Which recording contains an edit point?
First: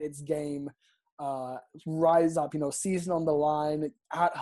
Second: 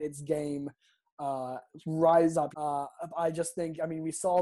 second; 1 cut; at 2.5 s

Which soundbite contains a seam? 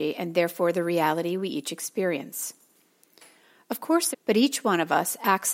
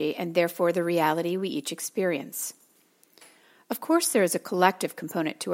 first; 1 cut; at 4.1 s

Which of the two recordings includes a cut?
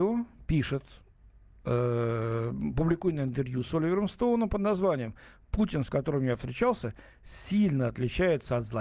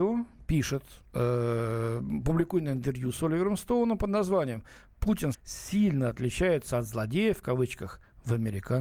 second; 2 cuts; at 1.1 s, 5.3 s

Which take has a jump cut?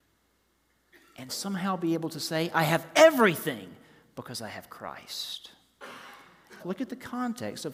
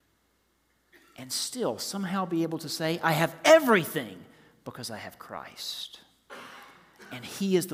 first; 2 cuts; at 1.3 s, 6.6 s

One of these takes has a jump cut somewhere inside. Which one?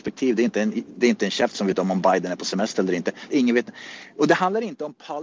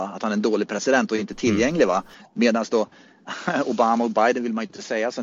first; 1 cut; at 3.3 s

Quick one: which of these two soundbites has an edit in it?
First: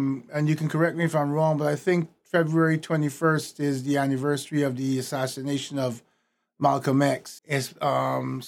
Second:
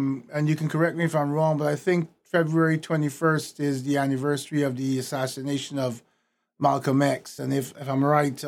first; 1 cut; at 7.4 s

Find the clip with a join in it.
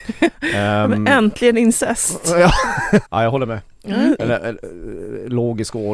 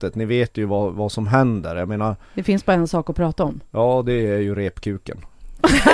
first; 2 cuts; at 3.0 s, 4.2 s

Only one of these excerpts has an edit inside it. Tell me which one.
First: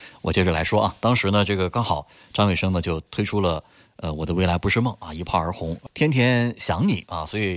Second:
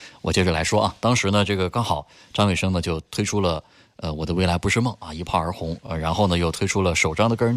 first; 1 cut; at 5.9 s

